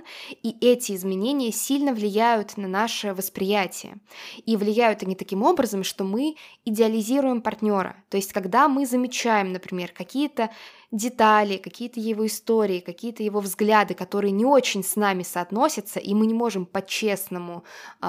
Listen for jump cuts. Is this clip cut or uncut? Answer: uncut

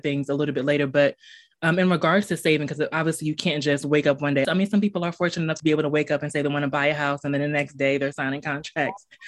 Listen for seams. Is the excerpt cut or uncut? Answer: cut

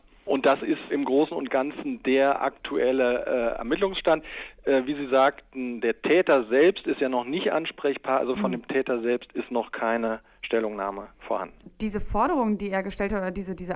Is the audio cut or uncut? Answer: cut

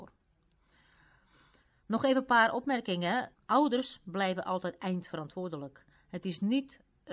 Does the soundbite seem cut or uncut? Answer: cut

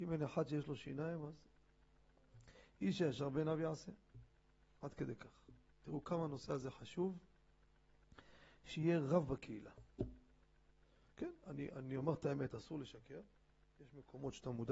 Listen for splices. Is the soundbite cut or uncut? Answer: uncut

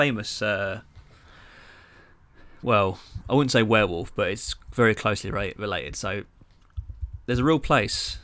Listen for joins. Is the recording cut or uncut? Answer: uncut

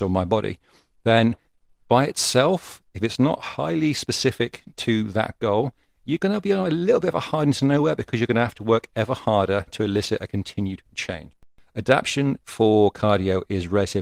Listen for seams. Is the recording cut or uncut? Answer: uncut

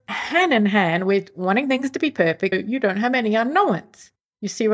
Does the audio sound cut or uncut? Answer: cut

